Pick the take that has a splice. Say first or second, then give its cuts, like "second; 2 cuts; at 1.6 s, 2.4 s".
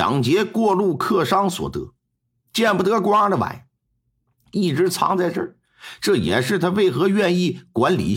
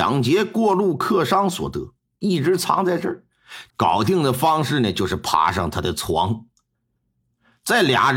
second; 2 cuts; at 2.2 s, 3.7 s